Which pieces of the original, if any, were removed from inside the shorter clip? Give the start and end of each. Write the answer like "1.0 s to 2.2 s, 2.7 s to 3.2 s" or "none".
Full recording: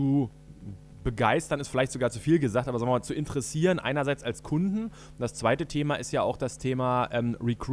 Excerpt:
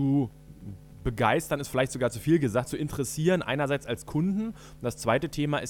2.6 s to 3.0 s